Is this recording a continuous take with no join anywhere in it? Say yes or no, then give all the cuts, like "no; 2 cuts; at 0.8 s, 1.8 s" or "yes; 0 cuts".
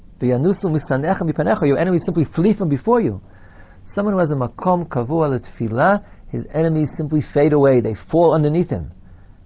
yes; 0 cuts